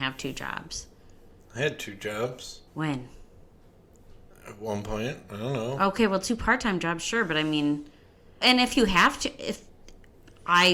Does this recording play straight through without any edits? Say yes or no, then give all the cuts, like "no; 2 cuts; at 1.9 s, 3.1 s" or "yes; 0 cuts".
no; 2 cuts; at 2.7 s, 8.4 s